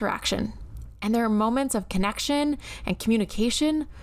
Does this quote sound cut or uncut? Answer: uncut